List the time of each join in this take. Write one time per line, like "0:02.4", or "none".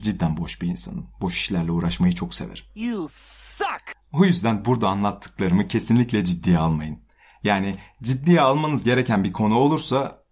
none